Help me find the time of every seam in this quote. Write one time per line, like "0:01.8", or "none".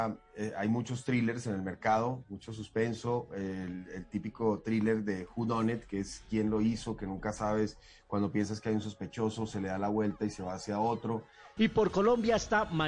0:11.6